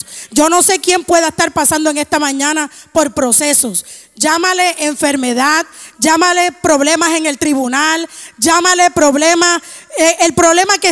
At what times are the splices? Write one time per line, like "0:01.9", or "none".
0:05.9

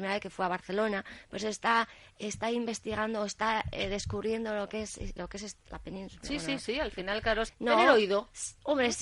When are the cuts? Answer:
0:05.2
0:07.5

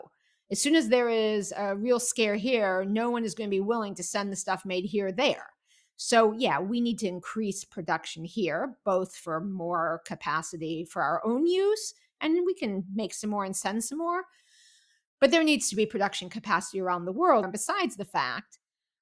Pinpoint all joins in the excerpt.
0:17.4

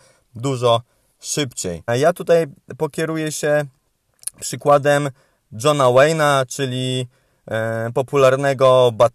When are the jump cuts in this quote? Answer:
0:01.9

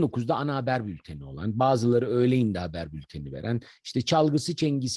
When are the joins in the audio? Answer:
none

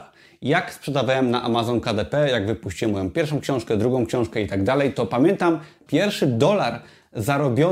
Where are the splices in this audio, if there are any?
0:05.9

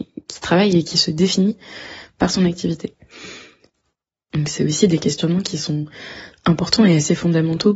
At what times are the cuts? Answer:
0:04.3

